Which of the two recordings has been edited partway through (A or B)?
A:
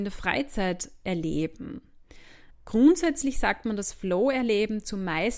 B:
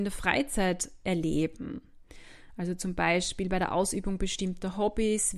A